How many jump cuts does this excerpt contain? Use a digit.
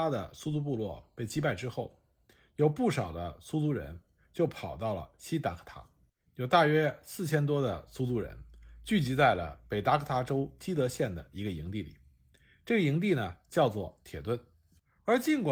1